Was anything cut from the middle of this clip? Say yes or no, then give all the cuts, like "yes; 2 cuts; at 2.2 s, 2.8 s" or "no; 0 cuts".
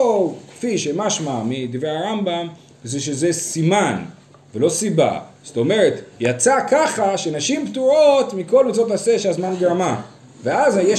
no; 0 cuts